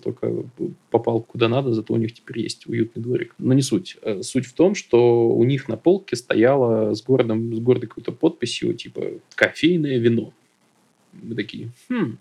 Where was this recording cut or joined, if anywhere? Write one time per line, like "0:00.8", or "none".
0:01.2
0:09.3